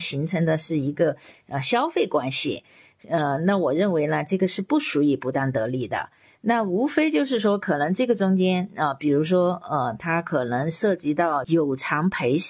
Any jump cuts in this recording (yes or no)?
no